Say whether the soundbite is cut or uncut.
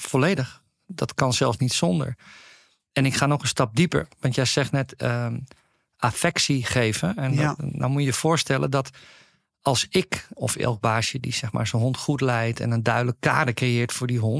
uncut